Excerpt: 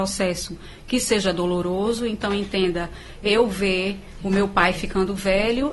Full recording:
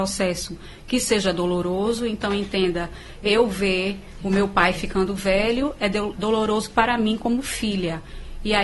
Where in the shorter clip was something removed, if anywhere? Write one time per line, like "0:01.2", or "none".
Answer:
none